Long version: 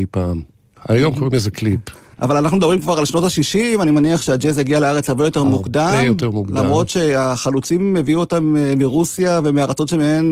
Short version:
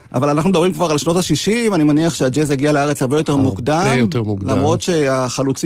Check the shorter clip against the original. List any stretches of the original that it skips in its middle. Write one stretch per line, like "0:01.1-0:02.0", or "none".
none